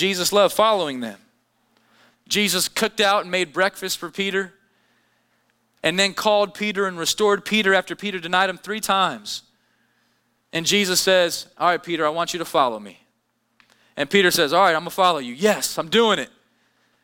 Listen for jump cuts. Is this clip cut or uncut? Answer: cut